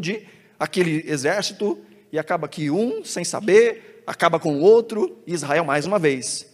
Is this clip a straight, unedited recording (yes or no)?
yes